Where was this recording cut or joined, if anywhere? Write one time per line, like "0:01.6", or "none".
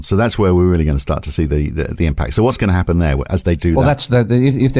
none